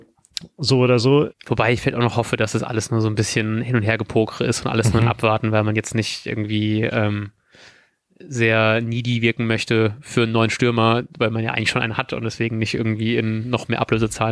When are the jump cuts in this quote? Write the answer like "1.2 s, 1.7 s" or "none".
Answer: 1.3 s